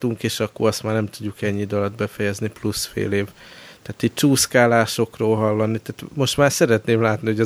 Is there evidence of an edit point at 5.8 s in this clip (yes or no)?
no